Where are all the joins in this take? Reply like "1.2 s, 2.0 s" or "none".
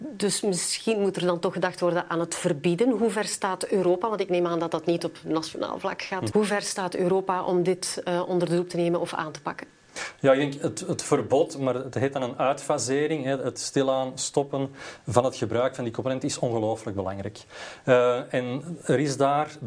6.3 s